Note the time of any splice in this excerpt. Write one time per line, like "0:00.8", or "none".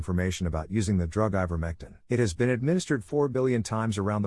0:02.1